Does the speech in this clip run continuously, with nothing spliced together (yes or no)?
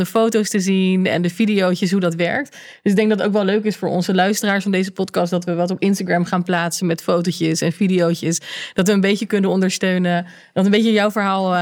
yes